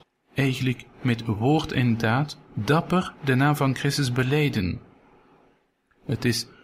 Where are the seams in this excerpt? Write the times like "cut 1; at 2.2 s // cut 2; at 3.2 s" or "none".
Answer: none